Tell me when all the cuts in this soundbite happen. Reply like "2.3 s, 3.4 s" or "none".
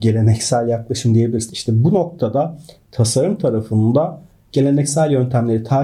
1.5 s